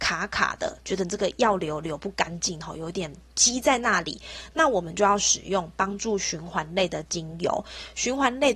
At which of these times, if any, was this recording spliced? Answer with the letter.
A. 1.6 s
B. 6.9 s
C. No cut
C